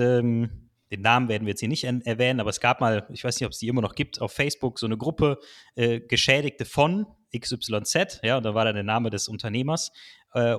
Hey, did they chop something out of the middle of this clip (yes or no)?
no